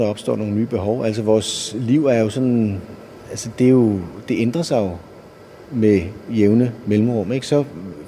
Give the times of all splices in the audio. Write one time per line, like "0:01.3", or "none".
none